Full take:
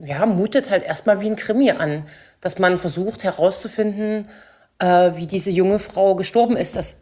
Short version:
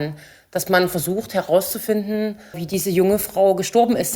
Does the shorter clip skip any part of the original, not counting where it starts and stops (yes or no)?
yes